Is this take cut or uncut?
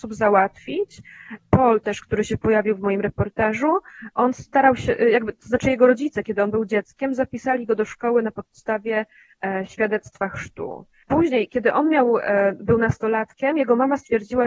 uncut